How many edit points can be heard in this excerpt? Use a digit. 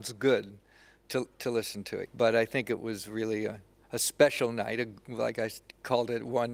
1